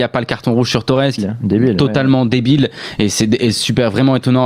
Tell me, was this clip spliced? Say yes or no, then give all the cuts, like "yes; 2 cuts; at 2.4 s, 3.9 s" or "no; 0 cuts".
yes; 1 cut; at 1.2 s